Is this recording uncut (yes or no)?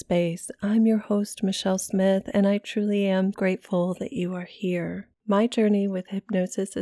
no